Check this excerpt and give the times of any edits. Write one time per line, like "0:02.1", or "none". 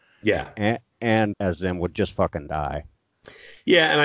0:01.3